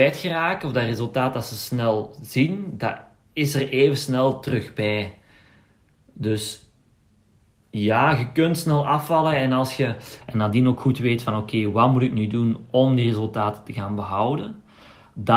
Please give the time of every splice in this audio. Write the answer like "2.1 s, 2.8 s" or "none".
10.2 s